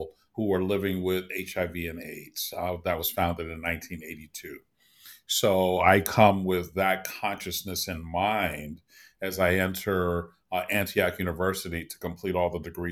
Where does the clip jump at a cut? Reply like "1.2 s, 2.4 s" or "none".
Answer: none

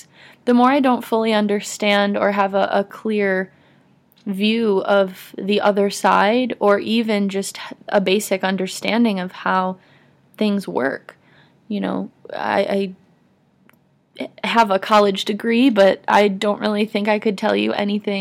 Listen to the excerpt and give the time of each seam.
none

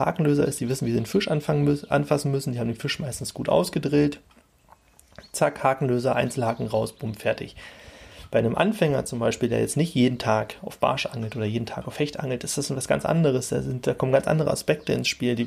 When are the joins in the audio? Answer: none

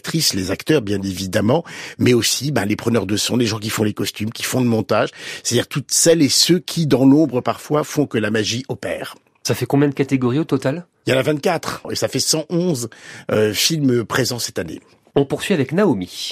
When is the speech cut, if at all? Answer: none

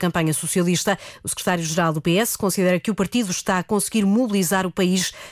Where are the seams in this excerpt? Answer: none

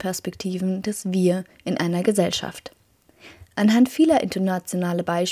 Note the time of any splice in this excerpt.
3.5 s

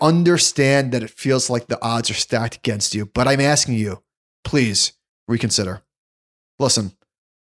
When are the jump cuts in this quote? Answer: none

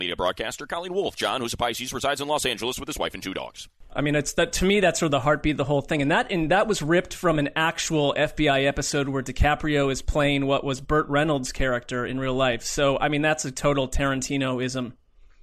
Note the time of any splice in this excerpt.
3.9 s

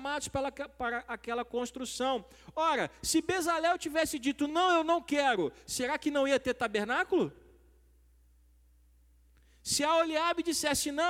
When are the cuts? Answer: none

